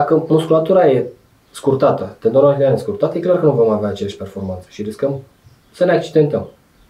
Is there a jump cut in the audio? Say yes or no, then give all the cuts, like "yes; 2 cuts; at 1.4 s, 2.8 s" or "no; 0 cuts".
no; 0 cuts